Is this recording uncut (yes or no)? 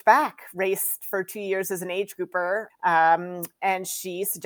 no